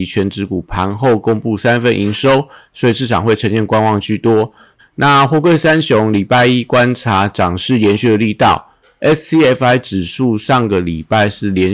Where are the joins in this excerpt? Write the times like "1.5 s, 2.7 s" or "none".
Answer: 4.8 s

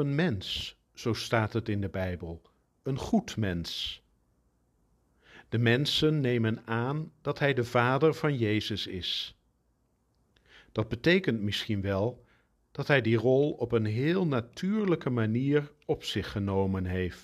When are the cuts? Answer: none

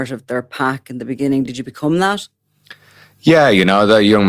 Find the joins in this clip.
none

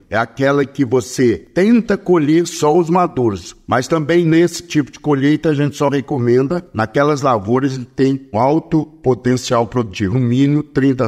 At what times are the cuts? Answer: 3.6 s, 8.3 s, 10.1 s

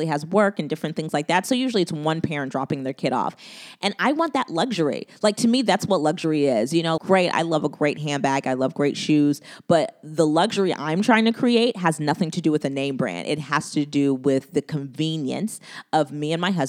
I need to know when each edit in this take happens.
7.0 s

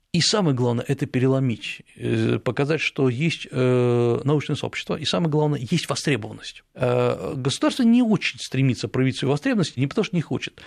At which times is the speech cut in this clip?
6.7 s, 9.8 s

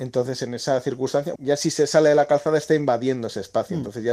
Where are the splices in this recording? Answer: 1.4 s

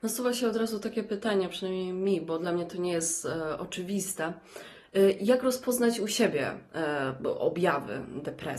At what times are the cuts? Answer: none

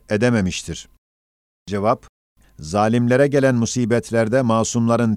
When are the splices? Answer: 2.4 s

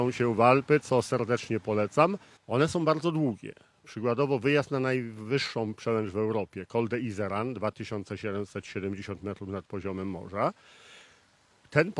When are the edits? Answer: 2.4 s

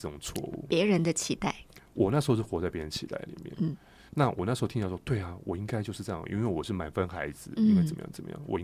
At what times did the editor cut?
none

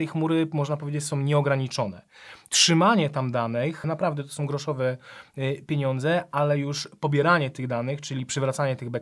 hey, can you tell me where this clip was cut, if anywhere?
3.8 s

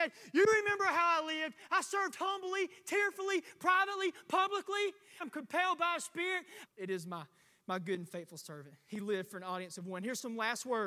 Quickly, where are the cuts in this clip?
5.2 s, 6.7 s

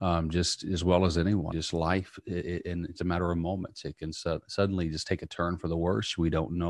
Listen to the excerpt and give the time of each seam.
1.5 s, 3.0 s

